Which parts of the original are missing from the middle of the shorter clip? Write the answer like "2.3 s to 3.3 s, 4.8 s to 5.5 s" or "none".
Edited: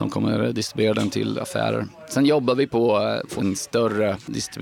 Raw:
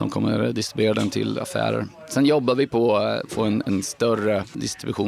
3.4 s to 3.6 s

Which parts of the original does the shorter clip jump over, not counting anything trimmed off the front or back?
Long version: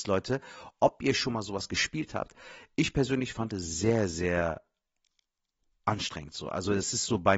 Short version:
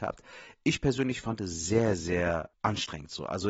4.7 s to 5.8 s

